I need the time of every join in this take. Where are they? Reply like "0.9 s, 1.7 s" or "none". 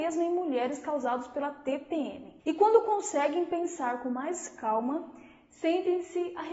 2.4 s